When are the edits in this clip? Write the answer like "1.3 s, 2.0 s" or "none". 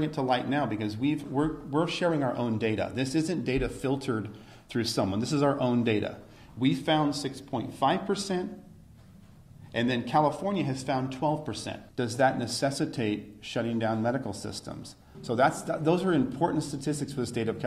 11.9 s, 15.1 s